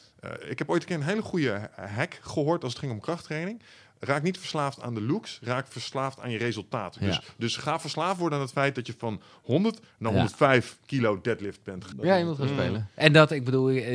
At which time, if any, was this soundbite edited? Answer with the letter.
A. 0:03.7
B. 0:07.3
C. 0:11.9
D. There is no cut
C